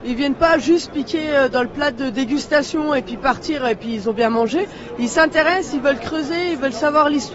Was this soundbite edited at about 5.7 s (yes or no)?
no